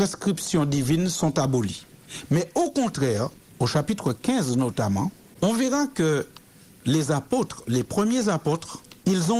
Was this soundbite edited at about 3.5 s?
yes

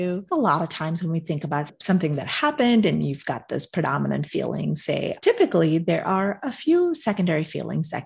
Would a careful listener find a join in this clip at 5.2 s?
yes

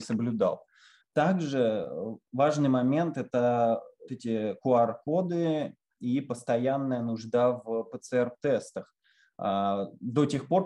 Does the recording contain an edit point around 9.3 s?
no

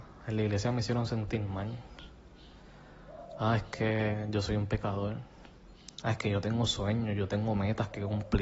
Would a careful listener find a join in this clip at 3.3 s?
no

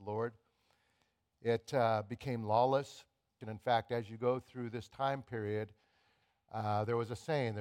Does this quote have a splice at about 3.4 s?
yes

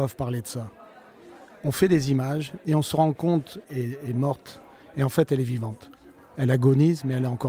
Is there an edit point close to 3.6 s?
yes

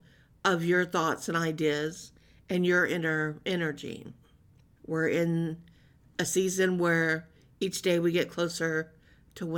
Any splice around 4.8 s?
yes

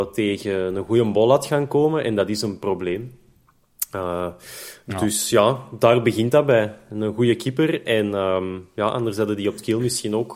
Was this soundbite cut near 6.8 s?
no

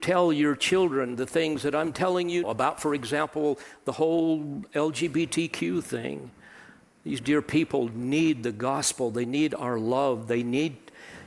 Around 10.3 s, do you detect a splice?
no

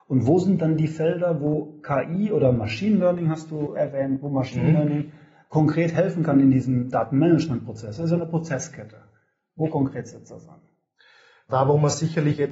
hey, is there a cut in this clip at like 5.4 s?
no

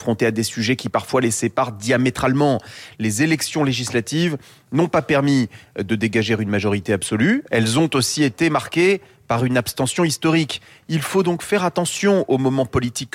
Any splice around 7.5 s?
yes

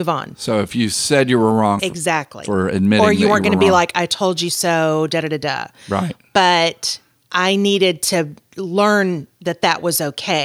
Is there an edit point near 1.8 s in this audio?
yes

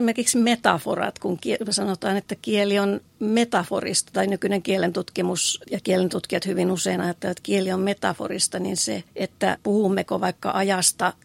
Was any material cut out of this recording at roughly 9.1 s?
yes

